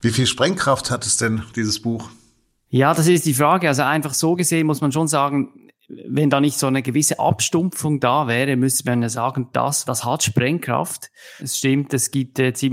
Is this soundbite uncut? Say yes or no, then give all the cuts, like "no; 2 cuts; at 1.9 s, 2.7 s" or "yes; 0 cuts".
no; 2 cuts; at 9.8 s, 11.4 s